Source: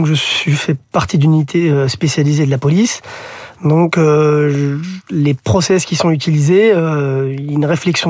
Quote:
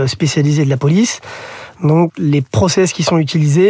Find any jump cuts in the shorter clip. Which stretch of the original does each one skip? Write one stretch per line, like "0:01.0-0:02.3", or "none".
0:03.9-0:05.0